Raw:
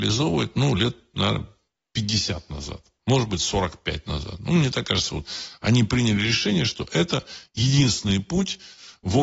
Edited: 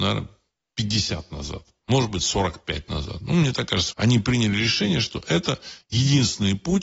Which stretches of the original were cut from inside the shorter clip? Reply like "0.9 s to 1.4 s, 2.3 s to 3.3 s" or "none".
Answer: 5.1 s to 5.6 s